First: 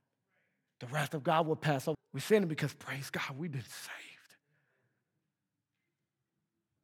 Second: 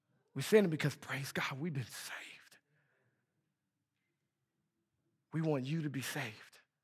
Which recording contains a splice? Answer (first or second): first